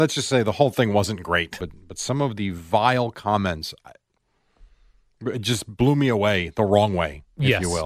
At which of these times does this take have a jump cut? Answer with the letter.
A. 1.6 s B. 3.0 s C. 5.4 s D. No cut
A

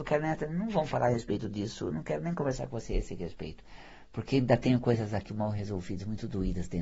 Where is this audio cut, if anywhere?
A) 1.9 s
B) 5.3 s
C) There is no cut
B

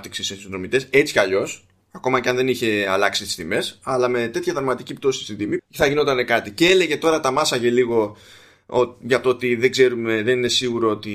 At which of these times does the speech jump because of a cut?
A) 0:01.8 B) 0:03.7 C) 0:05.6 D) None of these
C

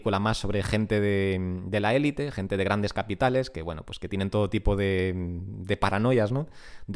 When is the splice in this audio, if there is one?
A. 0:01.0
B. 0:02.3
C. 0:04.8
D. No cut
D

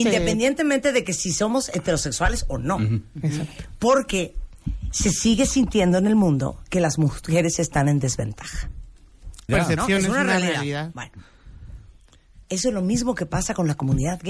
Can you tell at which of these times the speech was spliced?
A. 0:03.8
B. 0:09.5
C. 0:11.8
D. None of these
B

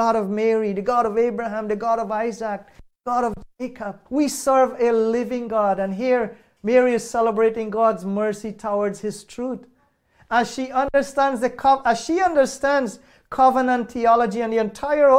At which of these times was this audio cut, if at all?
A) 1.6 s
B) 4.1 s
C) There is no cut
B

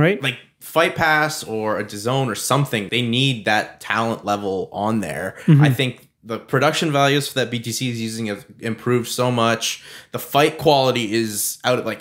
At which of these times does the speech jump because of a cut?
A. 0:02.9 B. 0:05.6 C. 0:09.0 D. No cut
A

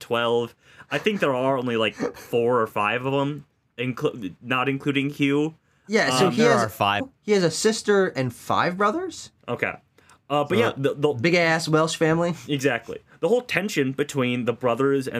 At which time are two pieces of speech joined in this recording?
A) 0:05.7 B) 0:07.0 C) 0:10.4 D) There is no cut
B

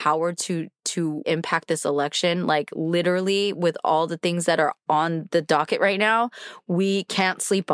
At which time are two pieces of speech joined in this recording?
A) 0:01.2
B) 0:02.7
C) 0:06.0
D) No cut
A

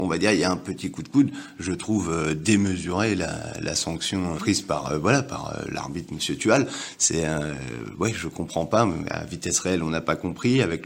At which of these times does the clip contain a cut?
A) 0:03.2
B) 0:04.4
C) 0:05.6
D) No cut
B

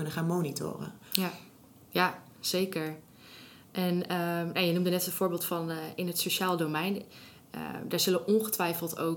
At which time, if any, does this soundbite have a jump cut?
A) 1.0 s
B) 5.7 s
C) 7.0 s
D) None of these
D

